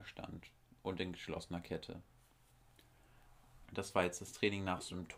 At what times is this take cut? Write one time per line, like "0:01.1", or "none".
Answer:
0:03.7